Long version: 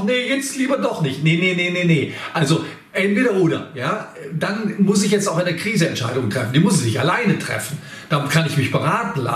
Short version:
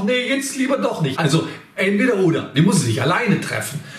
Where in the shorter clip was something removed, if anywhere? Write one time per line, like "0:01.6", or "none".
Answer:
0:01.2
0:02.5

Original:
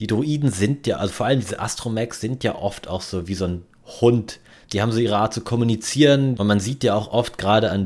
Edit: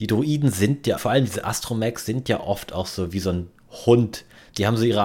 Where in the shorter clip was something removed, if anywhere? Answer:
0:01.0

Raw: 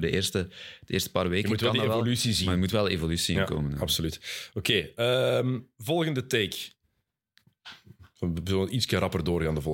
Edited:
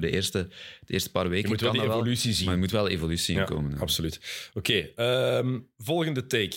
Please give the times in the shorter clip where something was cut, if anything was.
none

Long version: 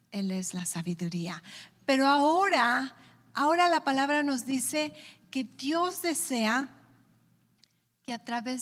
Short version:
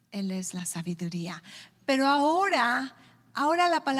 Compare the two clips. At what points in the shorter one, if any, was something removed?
none

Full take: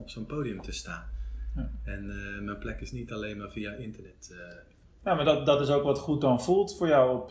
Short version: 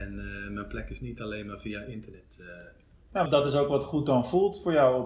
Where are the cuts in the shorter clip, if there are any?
0:03.3

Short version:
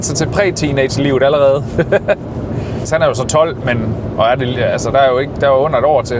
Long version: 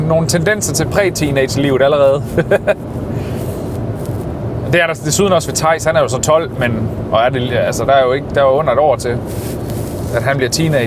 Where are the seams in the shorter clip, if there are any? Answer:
0:02.9

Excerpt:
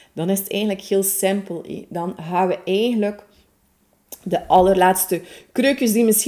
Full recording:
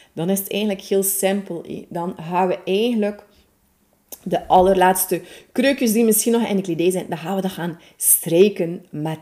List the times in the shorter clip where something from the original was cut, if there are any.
none

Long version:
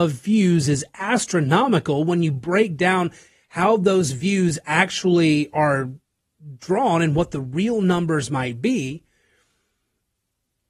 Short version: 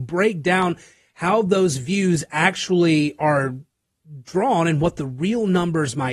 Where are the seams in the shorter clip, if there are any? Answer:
none

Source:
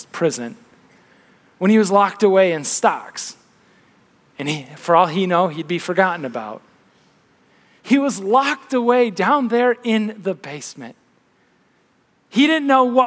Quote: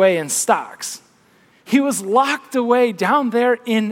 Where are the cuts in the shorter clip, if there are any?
0:01.5

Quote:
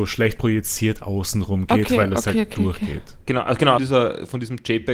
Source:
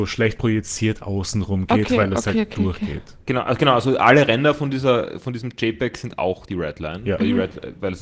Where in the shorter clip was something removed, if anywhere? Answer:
0:03.8

